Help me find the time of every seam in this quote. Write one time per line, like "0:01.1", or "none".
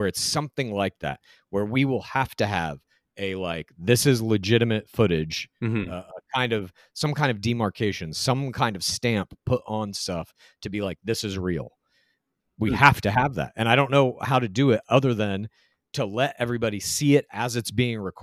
none

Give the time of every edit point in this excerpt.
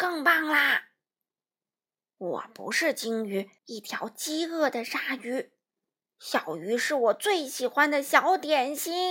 0:03.6

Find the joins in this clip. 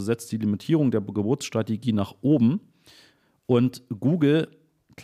none

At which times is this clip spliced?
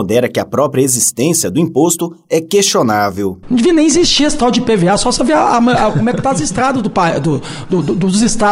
0:03.4

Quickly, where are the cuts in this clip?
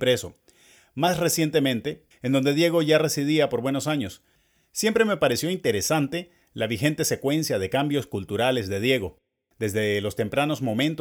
0:02.1

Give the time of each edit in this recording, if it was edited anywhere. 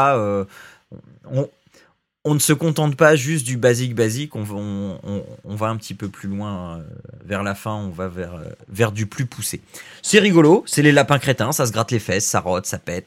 none

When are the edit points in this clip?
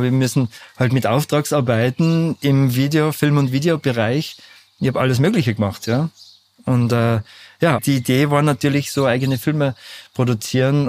0:07.8

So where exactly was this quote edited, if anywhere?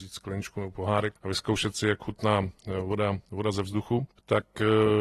0:01.2

